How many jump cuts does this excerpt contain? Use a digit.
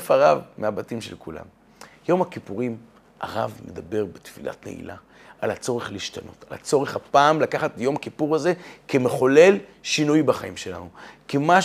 0